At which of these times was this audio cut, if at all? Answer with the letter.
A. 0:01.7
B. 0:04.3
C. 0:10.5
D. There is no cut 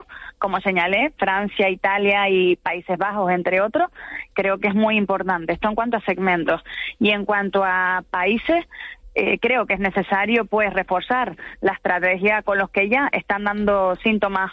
B